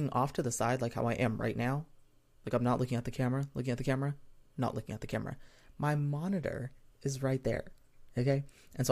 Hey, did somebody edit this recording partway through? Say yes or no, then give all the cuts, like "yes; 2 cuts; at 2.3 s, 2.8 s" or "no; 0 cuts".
no; 0 cuts